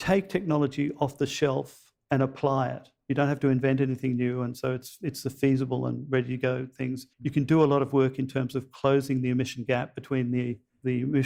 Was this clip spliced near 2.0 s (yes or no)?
yes